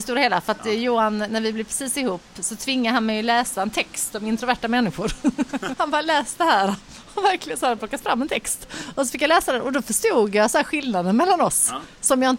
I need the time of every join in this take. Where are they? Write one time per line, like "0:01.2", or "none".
0:05.7